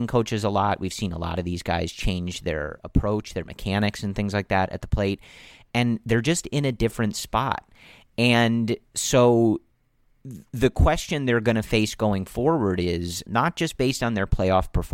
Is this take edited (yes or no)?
yes